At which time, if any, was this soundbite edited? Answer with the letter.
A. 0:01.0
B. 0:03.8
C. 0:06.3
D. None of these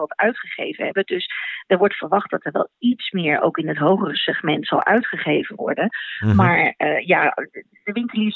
D